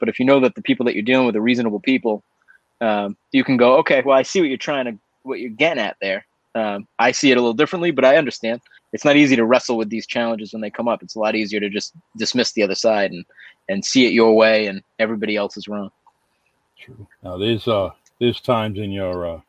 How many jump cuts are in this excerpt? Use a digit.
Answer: 2